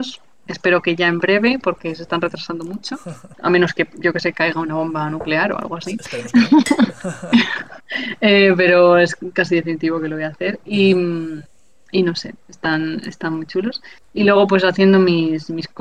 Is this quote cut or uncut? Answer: cut